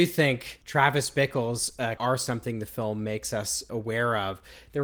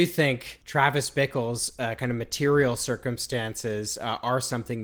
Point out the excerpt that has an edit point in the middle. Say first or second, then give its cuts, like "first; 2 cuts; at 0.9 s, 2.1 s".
first; 1 cut; at 2.0 s